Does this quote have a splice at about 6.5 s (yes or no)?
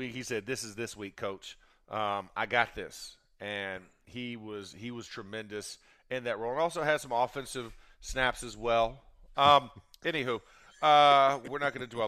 no